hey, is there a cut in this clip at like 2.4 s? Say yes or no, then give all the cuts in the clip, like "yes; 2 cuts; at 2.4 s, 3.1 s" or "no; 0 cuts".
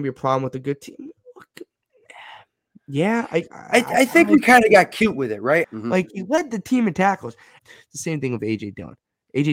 no; 2 cuts; at 5.6 s, 7.6 s